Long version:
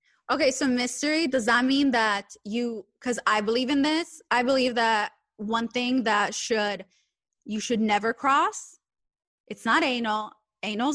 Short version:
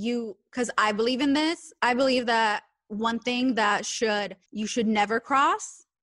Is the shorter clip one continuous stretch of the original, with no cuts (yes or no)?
no